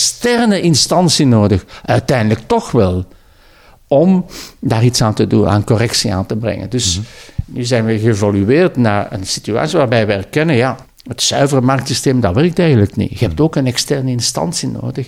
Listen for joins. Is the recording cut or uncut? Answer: uncut